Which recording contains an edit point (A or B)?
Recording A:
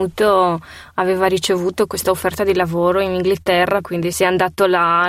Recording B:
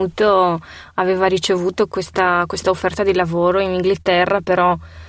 A